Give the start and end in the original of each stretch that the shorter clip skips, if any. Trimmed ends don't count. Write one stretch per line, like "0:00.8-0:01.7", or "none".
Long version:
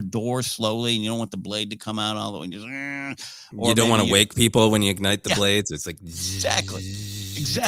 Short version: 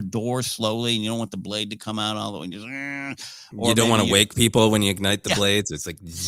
none